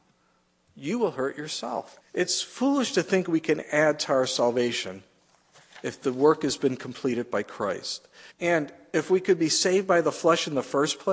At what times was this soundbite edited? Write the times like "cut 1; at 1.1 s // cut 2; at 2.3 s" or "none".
cut 1; at 2.0 s // cut 2; at 8.3 s